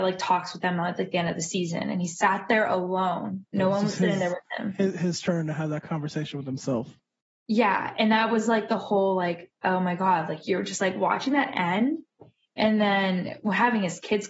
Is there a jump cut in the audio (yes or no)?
no